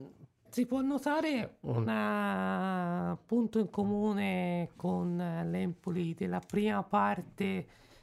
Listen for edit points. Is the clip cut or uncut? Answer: uncut